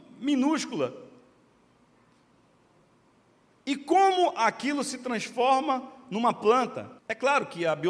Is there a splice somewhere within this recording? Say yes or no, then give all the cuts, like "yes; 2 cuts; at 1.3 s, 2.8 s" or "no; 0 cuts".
yes; 1 cut; at 7.0 s